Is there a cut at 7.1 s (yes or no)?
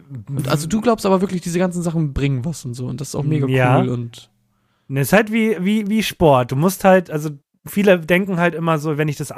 no